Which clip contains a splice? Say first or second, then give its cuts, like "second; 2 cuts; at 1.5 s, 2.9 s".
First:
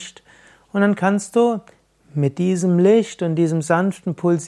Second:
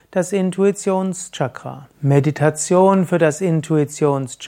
second; 1 cut; at 1.9 s